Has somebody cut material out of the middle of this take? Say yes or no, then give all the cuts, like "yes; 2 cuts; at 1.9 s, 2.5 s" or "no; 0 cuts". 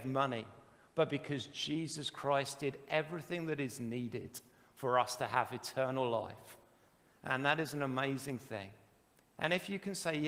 no; 0 cuts